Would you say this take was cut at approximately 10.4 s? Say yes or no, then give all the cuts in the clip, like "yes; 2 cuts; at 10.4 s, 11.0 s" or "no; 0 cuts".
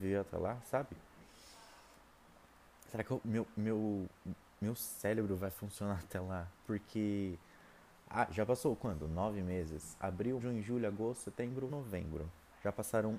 yes; 2 cuts; at 10.4 s, 11.7 s